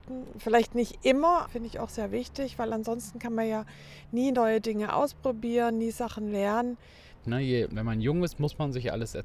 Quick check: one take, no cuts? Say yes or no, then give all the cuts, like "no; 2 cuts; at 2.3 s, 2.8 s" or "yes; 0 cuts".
no; 2 cuts; at 1.5 s, 7.2 s